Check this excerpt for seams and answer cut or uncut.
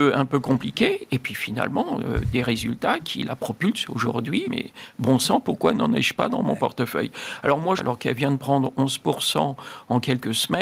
cut